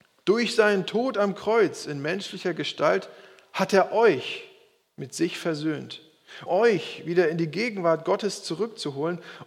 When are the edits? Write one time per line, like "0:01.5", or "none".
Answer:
0:06.5